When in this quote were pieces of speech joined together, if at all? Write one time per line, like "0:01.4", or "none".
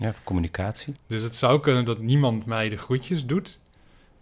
0:01.0